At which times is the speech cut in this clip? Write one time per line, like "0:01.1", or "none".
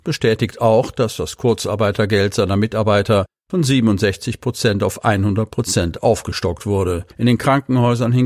0:07.1